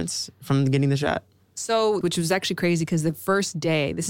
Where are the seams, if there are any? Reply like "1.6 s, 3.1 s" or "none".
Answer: 2.0 s